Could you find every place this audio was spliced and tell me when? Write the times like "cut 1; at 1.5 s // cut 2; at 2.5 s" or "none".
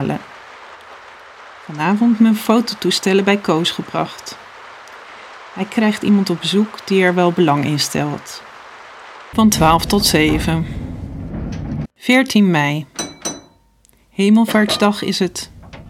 cut 1; at 9.3 s // cut 2; at 11.8 s